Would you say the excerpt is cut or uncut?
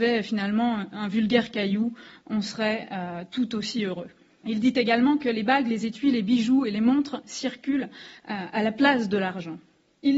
uncut